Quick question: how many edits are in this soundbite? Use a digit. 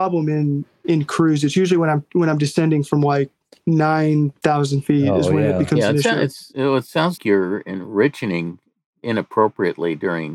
1